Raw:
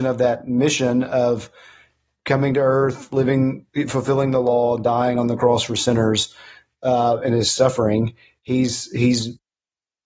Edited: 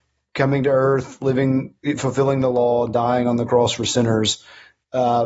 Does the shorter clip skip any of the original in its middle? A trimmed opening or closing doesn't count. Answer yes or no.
no